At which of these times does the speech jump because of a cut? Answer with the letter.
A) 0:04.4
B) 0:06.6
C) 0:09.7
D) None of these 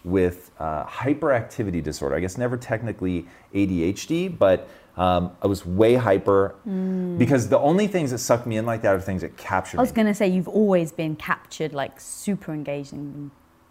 B